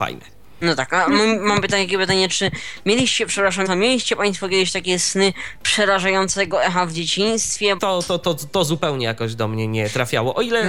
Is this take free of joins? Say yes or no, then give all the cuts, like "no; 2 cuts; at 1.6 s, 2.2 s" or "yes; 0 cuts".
no; 2 cuts; at 3.7 s, 7.8 s